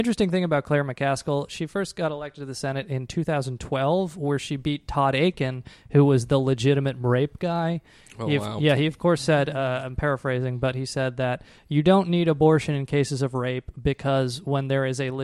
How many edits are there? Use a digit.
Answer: 0